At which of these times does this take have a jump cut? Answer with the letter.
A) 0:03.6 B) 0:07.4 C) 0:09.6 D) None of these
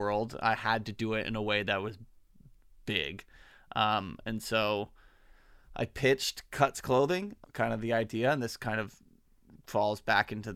B